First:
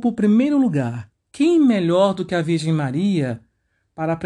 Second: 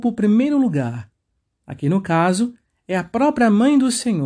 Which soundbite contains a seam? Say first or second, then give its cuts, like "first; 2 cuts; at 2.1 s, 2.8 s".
first; 1 cut; at 1.3 s